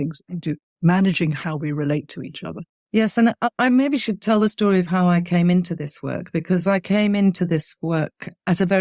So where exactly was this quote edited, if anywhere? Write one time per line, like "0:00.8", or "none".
0:02.7